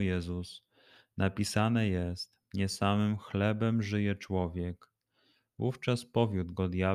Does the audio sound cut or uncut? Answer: uncut